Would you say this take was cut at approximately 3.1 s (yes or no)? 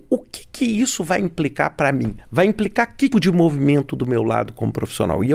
yes